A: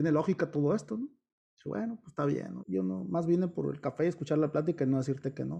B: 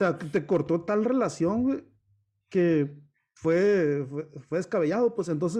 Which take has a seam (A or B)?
A